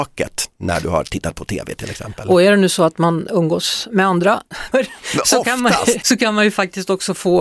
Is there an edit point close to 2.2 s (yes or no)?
no